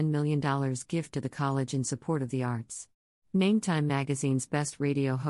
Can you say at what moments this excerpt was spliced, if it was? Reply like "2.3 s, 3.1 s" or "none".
3.2 s